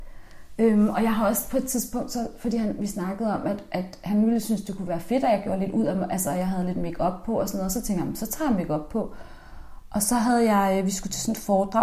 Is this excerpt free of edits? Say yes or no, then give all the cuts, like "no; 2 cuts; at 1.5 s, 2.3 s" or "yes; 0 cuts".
yes; 0 cuts